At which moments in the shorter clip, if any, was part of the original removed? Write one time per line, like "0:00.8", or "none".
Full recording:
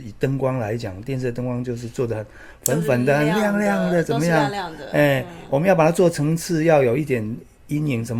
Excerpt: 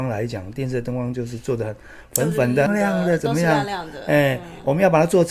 0:02.7